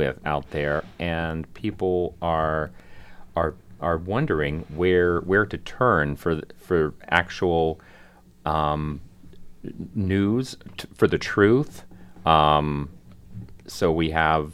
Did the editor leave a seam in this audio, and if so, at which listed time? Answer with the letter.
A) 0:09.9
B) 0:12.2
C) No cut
C